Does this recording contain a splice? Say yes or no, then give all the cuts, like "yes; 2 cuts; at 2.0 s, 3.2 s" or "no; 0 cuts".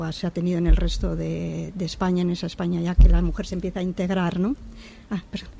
no; 0 cuts